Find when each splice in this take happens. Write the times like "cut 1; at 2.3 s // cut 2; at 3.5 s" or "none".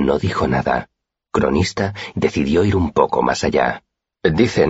cut 1; at 2.1 s

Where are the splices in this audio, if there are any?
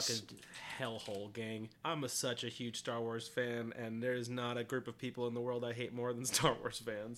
cut 1; at 1.8 s

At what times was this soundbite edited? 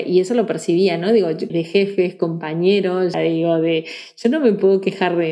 cut 1; at 1.5 s // cut 2; at 3.1 s

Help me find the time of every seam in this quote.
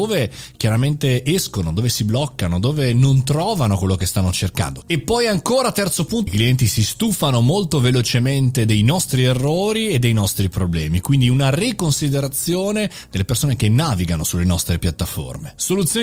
cut 1; at 4.8 s // cut 2; at 6.3 s

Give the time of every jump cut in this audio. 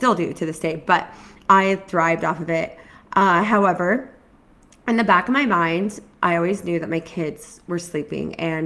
none

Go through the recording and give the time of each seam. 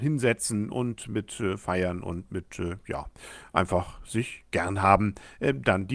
none

